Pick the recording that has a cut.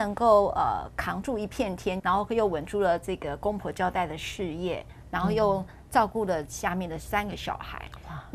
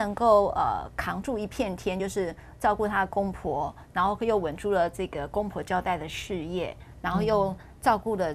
first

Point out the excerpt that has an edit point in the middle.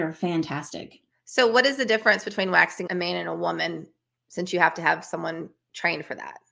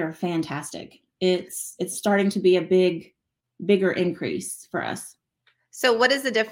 first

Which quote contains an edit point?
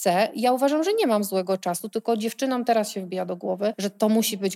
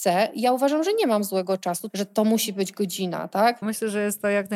second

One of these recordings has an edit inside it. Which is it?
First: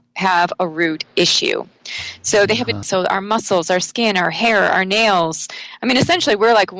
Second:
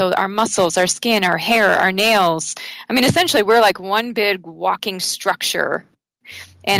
first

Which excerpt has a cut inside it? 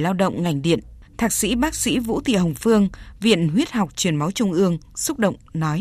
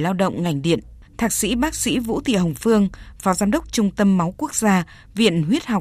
first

